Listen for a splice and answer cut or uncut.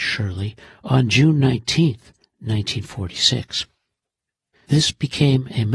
cut